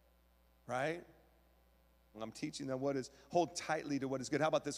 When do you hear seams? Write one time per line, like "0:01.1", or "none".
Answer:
0:02.1